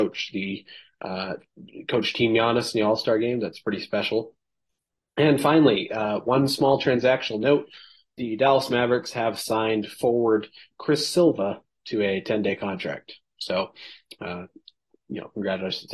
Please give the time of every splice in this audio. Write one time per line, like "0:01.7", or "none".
none